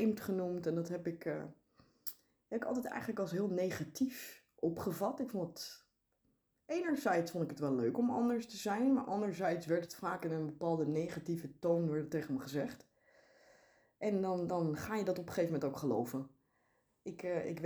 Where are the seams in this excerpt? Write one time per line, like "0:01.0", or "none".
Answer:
none